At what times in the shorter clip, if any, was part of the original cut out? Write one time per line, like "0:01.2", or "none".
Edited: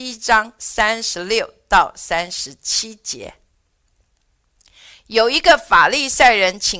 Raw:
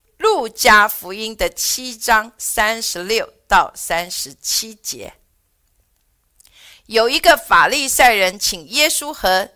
none